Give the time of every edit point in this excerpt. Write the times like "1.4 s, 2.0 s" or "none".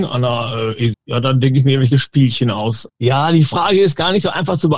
0.9 s, 2.9 s